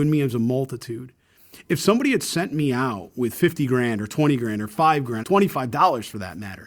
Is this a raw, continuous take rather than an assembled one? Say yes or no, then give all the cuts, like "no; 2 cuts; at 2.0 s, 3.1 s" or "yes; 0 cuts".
no; 1 cut; at 5.2 s